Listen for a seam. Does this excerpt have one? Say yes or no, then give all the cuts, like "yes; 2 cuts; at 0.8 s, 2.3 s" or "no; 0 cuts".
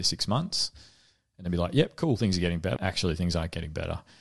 yes; 1 cut; at 2.8 s